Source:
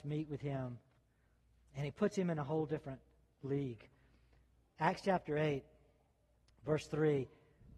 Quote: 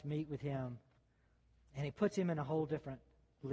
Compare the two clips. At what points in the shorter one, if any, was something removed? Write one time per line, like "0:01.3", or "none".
none

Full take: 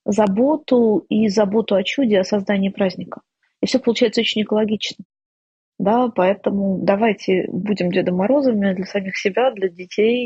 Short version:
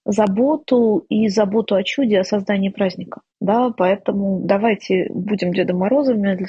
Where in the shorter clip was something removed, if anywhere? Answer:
0:03.3

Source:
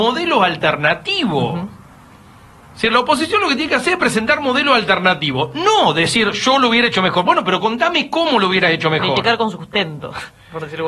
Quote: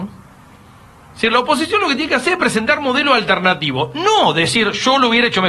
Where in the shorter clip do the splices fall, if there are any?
none

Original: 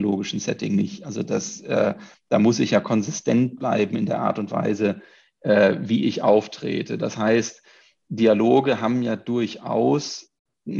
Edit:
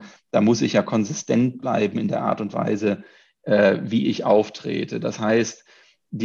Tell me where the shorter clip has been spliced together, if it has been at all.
none

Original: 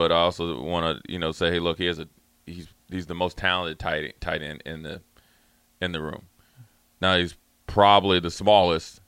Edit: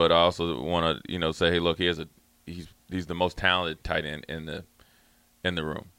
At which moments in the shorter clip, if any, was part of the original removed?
0:03.8

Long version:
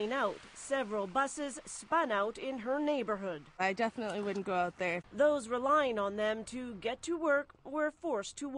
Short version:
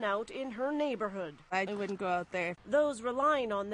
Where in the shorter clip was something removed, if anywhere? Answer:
0:01.7

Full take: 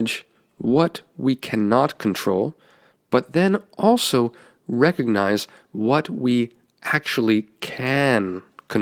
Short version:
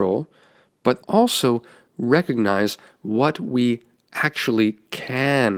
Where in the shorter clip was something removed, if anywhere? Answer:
0:01.0

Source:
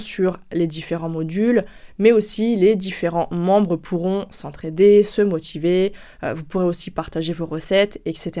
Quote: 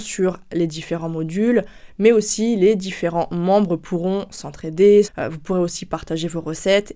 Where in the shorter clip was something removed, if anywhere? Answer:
0:05.0

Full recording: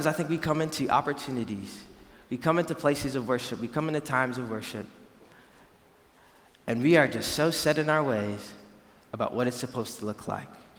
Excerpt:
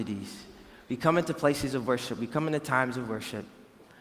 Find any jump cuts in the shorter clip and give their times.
none

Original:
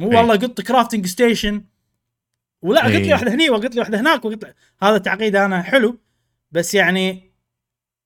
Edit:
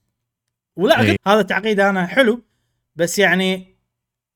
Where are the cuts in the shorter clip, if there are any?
0:01.2

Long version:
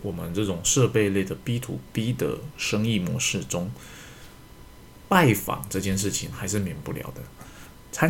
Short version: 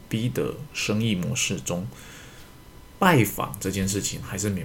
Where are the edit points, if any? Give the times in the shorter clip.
0:02.9

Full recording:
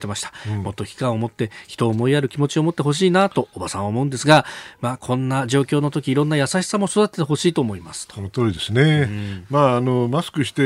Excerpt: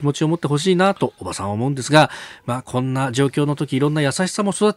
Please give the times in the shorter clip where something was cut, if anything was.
none

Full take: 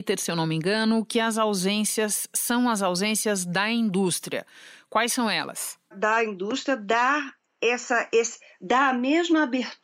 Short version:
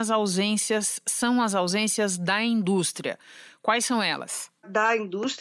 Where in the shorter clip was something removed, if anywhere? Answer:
none

